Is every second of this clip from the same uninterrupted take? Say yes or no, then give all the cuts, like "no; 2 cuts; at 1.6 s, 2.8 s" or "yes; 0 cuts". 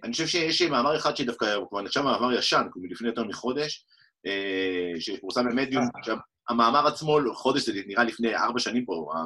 yes; 0 cuts